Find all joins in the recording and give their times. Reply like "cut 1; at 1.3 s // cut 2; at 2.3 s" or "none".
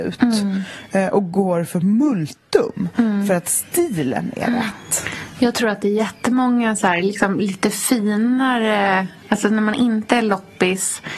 none